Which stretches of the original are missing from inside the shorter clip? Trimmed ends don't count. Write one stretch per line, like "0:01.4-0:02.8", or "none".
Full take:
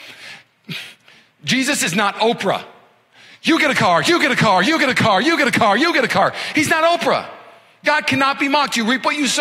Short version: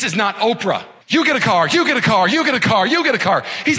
0:02.8-0:03.4
0:05.2-0:05.8